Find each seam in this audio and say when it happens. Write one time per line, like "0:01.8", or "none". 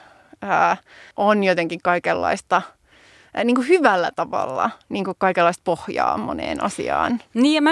0:01.1